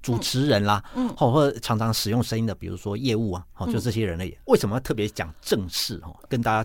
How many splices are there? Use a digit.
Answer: 1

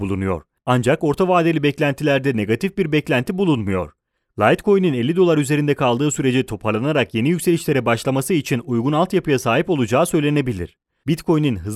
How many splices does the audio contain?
1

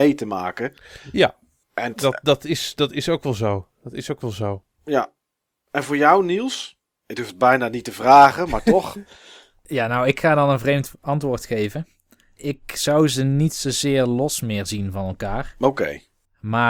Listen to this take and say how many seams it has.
1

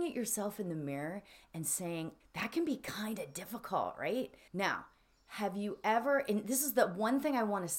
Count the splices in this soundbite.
2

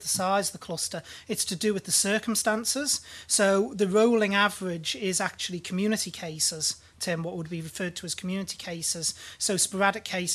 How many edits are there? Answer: 0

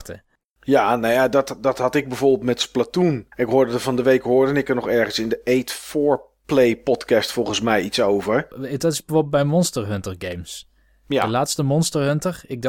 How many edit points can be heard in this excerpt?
2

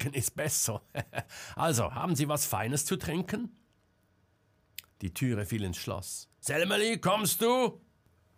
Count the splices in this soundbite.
2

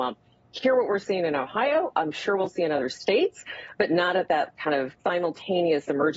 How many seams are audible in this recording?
1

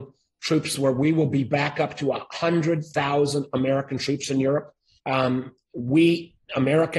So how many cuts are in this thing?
1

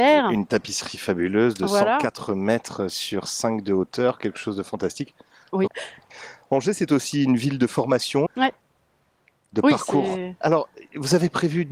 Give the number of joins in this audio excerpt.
3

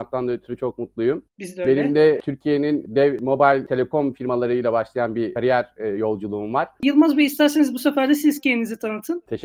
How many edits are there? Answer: 2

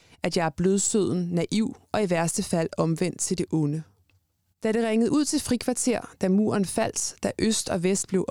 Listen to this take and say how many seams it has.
0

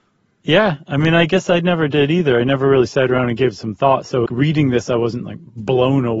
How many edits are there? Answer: 1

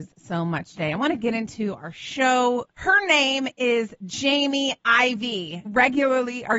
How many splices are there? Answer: 2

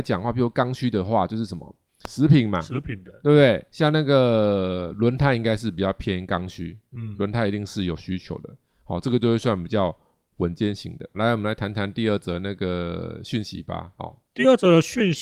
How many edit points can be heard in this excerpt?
1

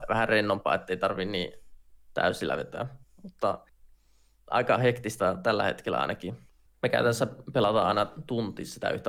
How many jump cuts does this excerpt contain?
1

